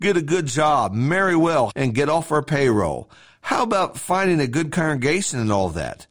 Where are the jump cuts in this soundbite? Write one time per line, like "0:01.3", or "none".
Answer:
0:01.7